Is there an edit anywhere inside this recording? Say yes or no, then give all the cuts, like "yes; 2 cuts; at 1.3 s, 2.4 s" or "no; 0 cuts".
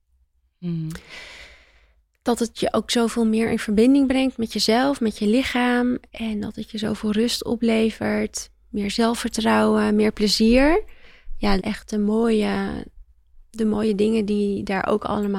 yes; 1 cut; at 11.6 s